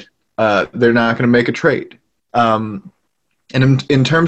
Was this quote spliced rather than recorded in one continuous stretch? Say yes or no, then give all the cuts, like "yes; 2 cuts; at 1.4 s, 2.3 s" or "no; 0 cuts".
yes; 1 cut; at 2.3 s